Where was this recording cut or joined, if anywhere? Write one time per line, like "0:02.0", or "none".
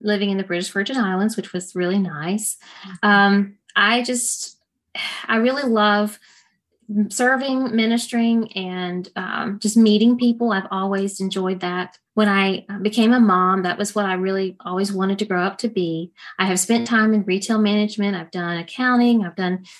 0:12.1